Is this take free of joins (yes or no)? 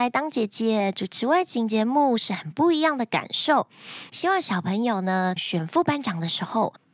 no